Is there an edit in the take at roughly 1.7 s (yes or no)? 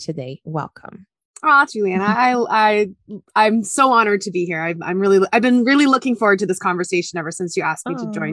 yes